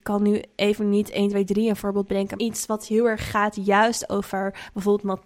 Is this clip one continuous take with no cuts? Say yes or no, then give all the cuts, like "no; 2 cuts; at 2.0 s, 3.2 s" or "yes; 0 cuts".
no; 1 cut; at 2.4 s